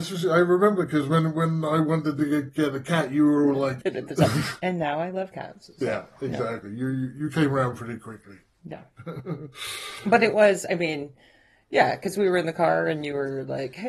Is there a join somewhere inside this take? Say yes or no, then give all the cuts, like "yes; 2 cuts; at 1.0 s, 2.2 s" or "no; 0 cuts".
yes; 1 cut; at 3.8 s